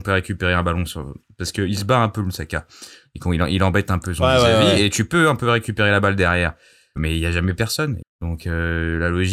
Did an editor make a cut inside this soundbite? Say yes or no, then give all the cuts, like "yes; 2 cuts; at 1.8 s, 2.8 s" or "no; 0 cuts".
yes; 2 cuts; at 7.0 s, 8.0 s